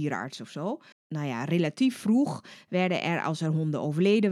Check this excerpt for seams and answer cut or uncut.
cut